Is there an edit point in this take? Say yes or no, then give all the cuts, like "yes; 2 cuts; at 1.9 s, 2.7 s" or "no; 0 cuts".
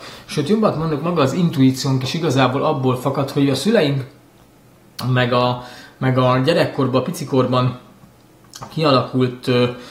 no; 0 cuts